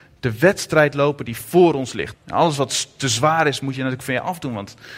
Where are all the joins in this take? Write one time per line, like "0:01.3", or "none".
0:02.1